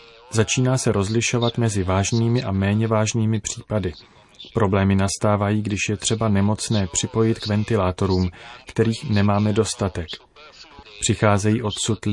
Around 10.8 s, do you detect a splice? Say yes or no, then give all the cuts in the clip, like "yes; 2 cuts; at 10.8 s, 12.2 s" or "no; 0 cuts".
yes; 1 cut; at 10.8 s